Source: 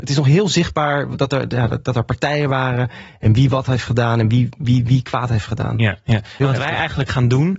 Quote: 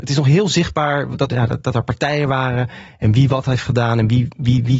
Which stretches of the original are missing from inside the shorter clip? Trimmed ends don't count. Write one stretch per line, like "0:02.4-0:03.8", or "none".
0:01.3-0:01.5